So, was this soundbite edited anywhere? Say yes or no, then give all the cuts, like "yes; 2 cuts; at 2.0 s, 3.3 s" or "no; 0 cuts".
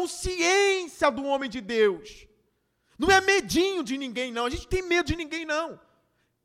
no; 0 cuts